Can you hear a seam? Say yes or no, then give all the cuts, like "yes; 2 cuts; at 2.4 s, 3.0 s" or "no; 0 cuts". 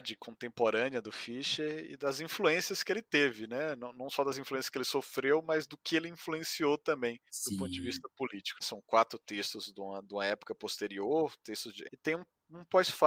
yes; 3 cuts; at 7.3 s, 8.6 s, 11.9 s